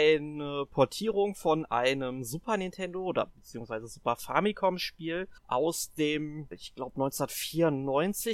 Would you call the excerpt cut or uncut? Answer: cut